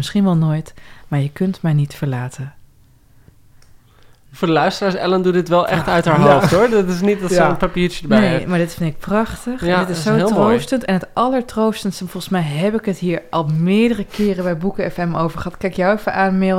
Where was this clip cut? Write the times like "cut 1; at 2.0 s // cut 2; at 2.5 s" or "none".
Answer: none